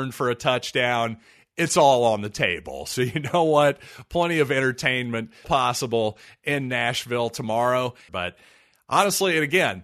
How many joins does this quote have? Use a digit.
2